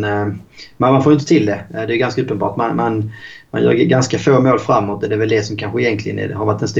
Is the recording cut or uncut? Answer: uncut